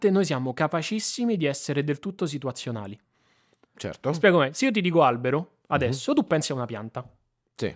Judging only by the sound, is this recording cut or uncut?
uncut